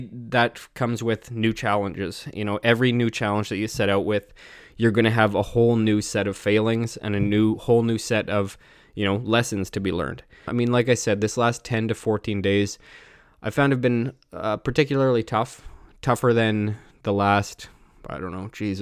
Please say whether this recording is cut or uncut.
cut